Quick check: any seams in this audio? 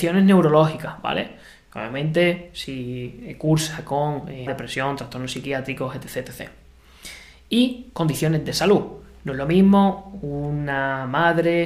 yes; 1 cut; at 4.5 s

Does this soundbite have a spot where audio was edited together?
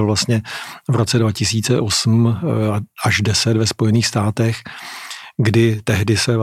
no; 0 cuts

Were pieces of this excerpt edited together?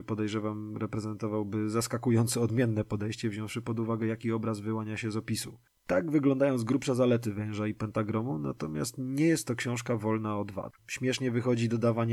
yes; 1 cut; at 10.8 s

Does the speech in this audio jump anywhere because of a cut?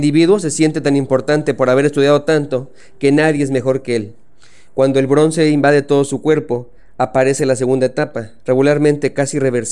no; 0 cuts

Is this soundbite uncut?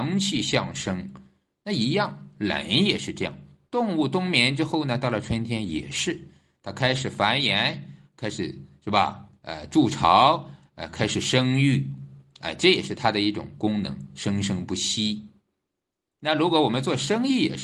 yes; 0 cuts

